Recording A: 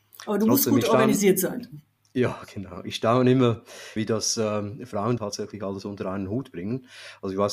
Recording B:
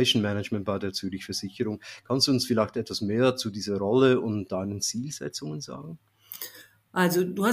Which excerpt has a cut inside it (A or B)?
A